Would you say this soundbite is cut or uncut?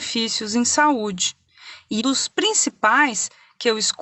cut